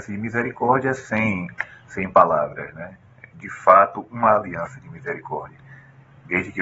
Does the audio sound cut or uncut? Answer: uncut